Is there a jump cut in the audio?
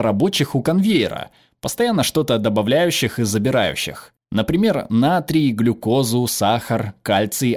no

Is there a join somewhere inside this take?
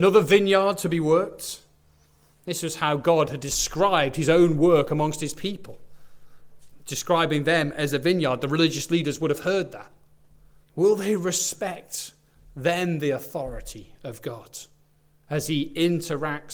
yes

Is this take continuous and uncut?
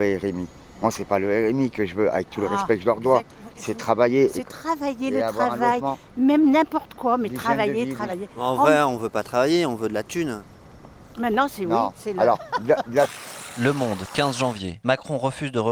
yes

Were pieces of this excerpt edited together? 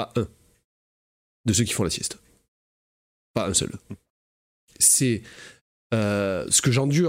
no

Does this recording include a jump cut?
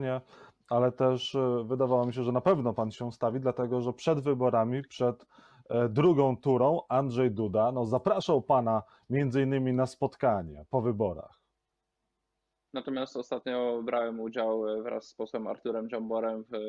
yes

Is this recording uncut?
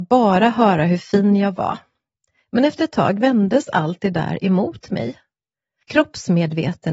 no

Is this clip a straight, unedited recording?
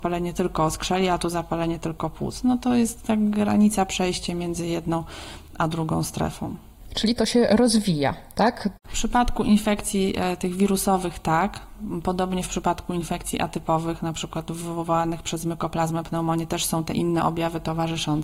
no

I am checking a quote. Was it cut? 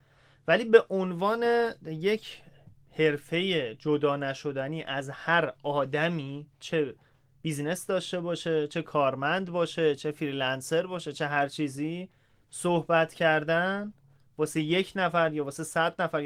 no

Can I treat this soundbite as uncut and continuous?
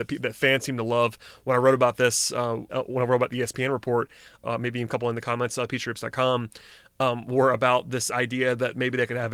no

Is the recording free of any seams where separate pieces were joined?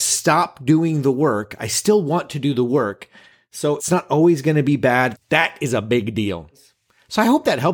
no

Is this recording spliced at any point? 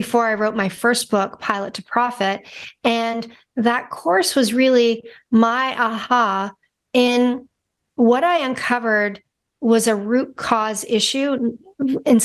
no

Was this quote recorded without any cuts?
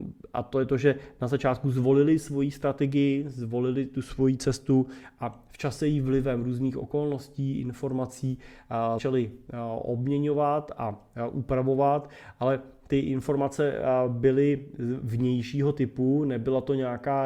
no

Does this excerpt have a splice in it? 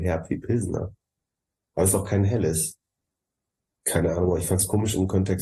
yes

